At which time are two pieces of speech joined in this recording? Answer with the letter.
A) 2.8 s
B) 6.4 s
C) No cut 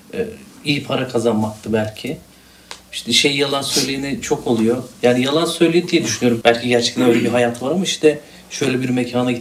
B